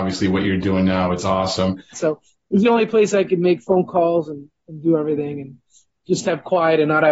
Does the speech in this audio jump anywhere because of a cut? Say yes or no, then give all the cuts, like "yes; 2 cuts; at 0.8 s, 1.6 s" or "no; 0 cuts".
yes; 1 cut; at 1.9 s